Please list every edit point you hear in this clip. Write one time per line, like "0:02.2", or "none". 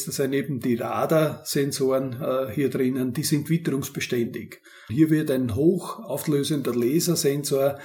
0:04.9